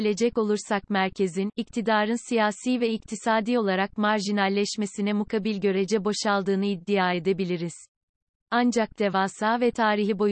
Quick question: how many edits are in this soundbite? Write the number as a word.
zero